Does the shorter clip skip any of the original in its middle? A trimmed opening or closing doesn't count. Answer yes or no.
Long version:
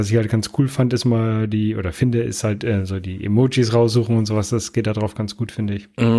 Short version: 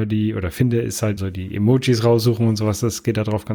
yes